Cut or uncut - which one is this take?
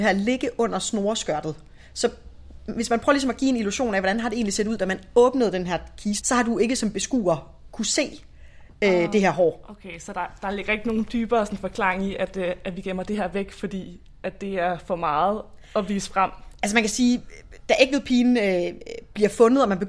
cut